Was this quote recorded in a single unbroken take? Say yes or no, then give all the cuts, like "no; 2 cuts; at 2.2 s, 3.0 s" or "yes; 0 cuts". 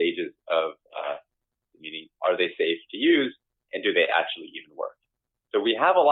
no; 1 cut; at 1.7 s